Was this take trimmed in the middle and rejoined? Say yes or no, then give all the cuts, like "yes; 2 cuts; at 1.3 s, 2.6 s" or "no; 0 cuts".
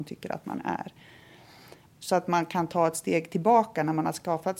yes; 1 cut; at 1.8 s